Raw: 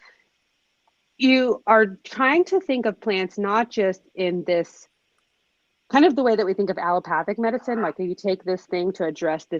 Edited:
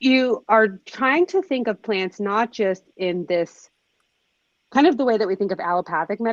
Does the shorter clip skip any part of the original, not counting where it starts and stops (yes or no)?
no